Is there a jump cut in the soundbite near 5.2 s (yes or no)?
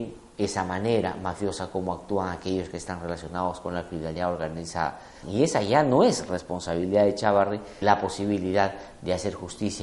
yes